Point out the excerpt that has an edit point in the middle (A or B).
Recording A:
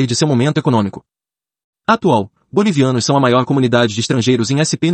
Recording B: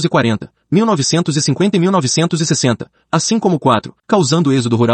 B